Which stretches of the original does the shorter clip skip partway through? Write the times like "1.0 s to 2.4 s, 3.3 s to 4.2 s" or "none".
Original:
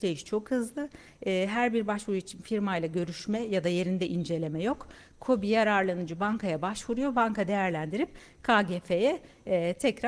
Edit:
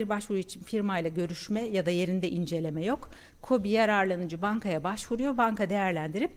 none